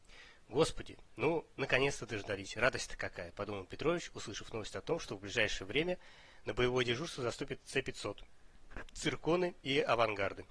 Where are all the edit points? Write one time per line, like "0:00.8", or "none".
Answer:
none

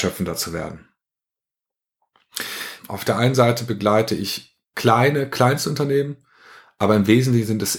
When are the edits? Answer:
0:02.8

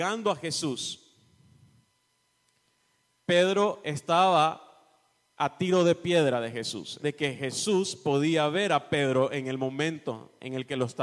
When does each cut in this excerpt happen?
0:07.0

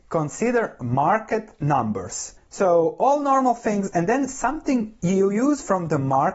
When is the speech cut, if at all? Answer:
0:02.4

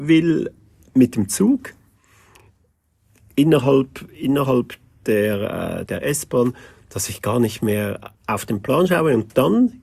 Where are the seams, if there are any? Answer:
0:05.9
0:08.1

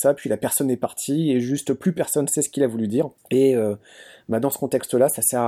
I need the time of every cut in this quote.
0:03.2

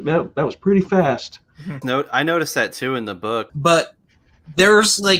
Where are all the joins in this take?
0:01.8
0:03.5

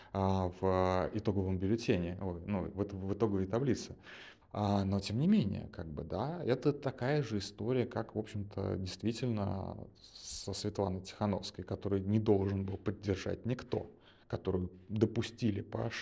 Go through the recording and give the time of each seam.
0:04.4

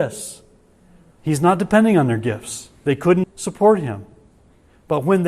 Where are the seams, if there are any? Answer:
0:01.2
0:03.2

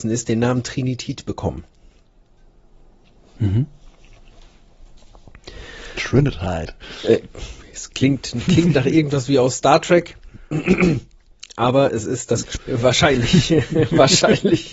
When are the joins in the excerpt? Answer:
0:12.6

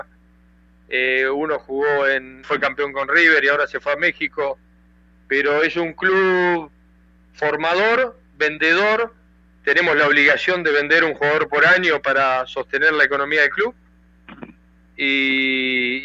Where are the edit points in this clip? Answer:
0:02.4

